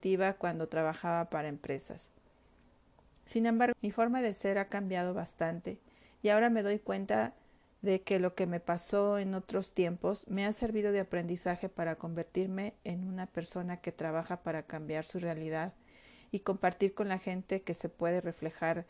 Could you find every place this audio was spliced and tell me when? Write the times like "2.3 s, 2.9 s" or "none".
3.7 s